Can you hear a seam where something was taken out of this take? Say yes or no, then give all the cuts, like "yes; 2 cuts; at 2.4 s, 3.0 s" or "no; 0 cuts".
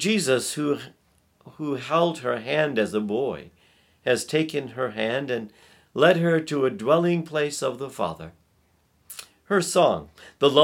no; 0 cuts